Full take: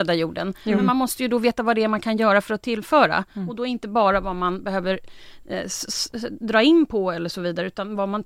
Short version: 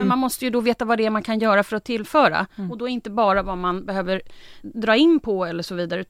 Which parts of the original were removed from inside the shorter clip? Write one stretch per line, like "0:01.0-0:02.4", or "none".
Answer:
0:05.4-0:06.3